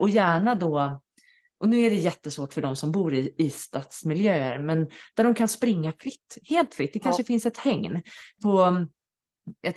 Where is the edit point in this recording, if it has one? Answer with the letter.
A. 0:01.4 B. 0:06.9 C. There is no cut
C